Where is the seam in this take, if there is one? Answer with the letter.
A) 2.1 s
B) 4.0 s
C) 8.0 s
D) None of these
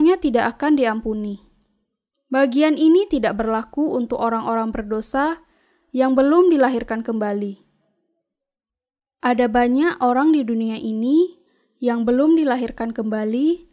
A